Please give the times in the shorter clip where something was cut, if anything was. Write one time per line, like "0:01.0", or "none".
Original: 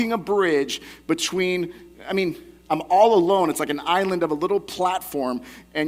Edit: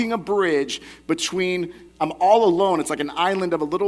0:01.9